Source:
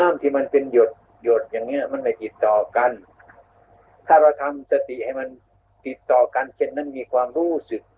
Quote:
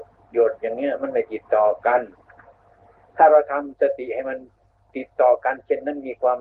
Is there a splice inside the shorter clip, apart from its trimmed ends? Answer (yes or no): no